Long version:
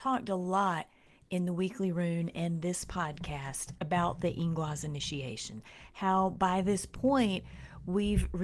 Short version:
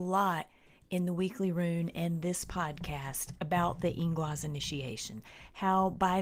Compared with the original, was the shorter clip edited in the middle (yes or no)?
no